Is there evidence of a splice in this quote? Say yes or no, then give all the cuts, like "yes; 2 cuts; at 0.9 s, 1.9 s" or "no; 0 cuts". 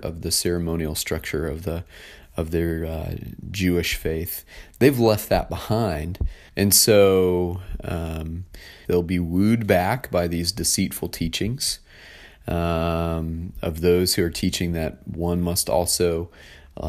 yes; 2 cuts; at 6.5 s, 8.9 s